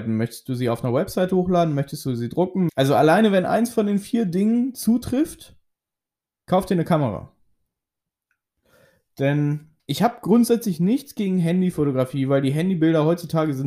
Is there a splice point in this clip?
yes; 2 cuts; at 2.7 s, 9.8 s

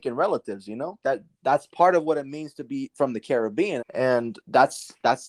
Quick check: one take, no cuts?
no; 2 cuts; at 1.0 s, 3.8 s

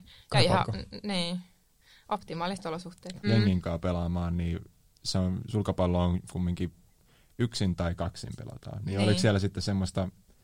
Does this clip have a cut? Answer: yes; 1 cut; at 3.2 s

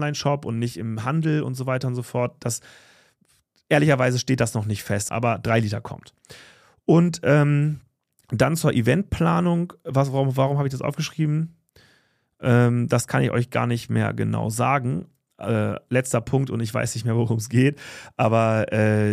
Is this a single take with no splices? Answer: no; 1 cut; at 5.1 s

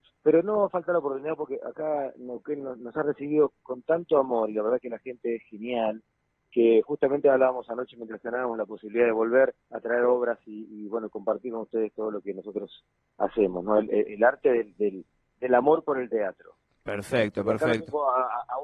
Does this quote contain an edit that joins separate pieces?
yes; 1 cut; at 9.6 s

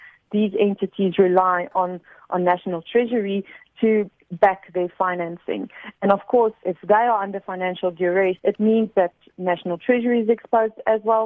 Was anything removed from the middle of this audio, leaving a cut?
yes; 2 cuts; at 6.6 s, 8.4 s

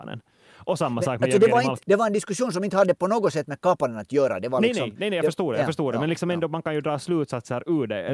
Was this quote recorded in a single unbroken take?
yes; 0 cuts

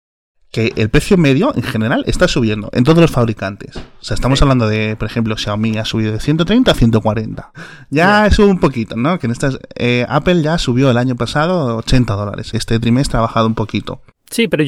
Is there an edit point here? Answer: yes; 1 cut; at 12.5 s

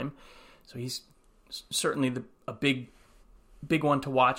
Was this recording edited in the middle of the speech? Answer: no; 0 cuts

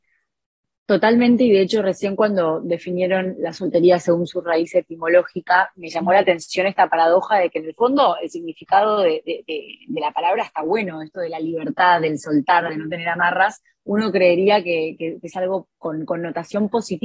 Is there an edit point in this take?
no; 0 cuts

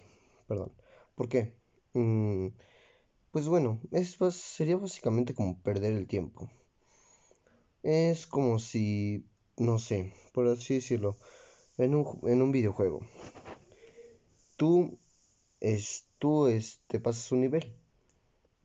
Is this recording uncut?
yes; 0 cuts

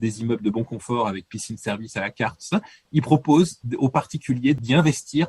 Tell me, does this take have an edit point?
no; 0 cuts

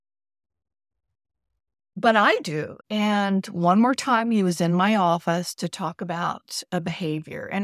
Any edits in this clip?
yes; 1 cut; at 2.8 s

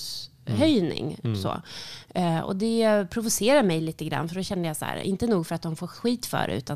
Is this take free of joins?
yes; 0 cuts

